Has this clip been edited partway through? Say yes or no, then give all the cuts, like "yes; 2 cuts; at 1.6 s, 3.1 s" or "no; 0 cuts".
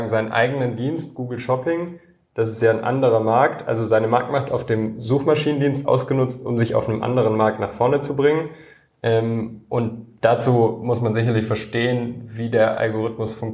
no; 0 cuts